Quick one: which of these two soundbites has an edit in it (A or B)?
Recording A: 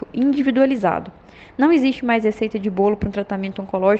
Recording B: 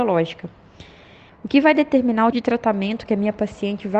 B